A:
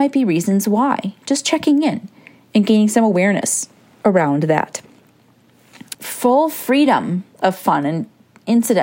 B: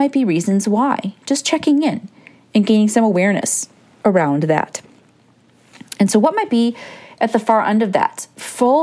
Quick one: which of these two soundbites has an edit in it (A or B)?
A